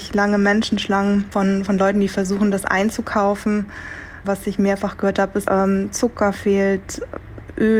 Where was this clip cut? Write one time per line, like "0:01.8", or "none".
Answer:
0:04.2
0:05.5